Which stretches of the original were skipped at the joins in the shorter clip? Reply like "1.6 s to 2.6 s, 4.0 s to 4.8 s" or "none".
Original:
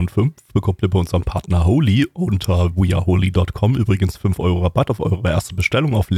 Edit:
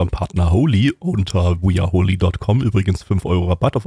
none